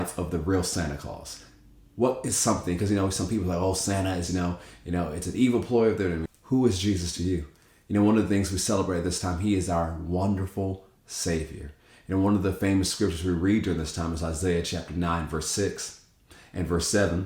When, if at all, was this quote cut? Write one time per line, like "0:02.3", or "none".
0:04.3
0:06.3

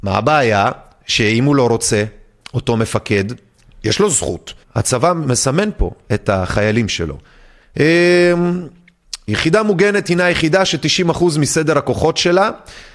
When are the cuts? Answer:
0:04.6
0:07.6
0:09.3

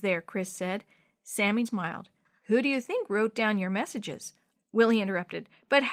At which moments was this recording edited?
0:01.6
0:04.5

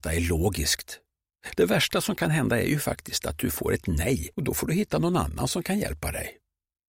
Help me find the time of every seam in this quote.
0:01.6
0:04.3

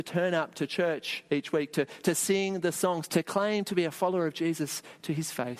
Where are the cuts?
0:03.1

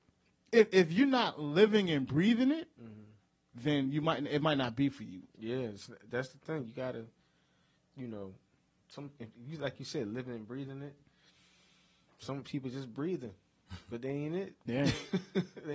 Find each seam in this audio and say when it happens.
0:07.8

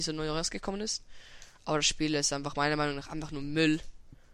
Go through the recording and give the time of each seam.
none

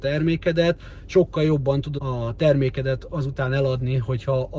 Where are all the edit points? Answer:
0:02.0

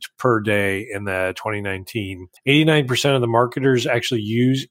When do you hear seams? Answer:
0:02.4

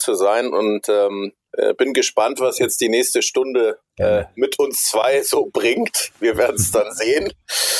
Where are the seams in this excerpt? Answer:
0:01.5

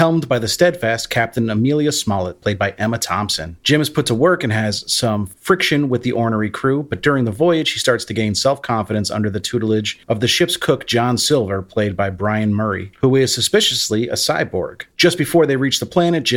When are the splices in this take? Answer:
0:03.6

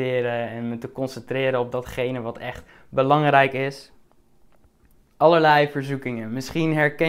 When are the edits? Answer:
0:05.0

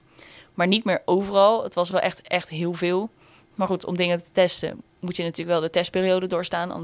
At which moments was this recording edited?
none

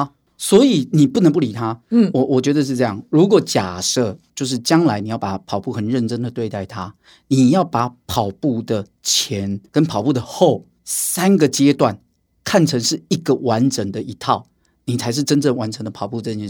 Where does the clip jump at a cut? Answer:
0:10.8

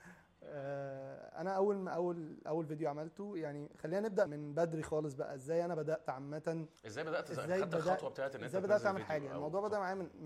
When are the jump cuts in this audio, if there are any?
0:04.3
0:06.8

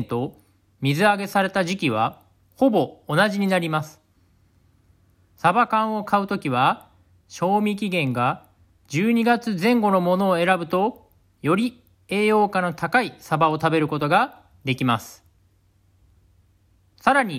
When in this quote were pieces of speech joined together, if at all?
none

